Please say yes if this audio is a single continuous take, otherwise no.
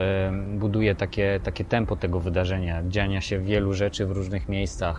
yes